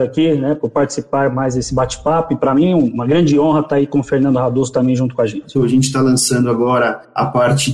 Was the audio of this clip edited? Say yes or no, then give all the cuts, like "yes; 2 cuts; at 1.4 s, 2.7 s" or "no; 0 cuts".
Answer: yes; 1 cut; at 5.5 s